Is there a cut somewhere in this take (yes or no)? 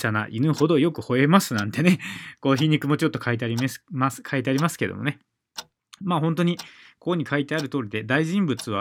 no